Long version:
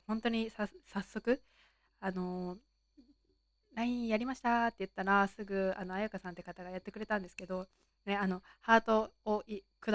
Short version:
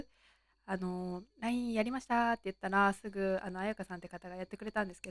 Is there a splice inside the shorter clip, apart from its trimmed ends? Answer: yes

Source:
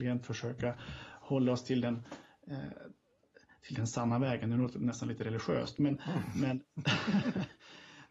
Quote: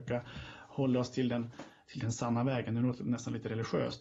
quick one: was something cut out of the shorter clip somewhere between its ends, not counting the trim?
yes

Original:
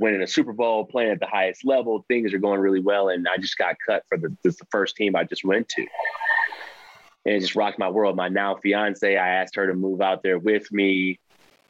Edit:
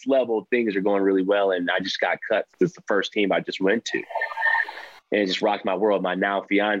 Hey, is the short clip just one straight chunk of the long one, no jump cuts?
no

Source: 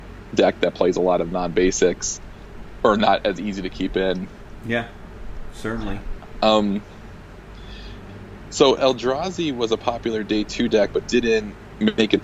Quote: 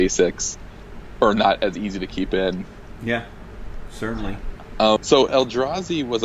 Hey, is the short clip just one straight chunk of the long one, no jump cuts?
no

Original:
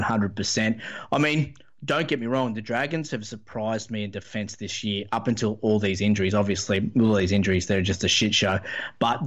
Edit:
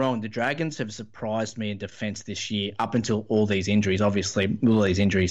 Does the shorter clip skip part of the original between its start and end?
no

